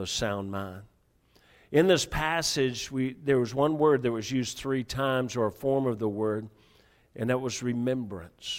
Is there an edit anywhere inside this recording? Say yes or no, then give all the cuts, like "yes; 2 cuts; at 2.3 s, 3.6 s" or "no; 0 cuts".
no; 0 cuts